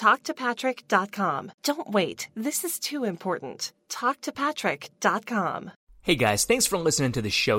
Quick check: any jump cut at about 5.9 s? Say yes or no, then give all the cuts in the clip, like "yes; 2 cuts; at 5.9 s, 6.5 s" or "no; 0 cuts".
no; 1 cut; at 1.6 s